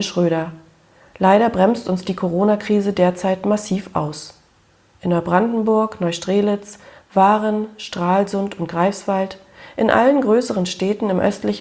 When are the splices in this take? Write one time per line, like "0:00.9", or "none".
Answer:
0:04.9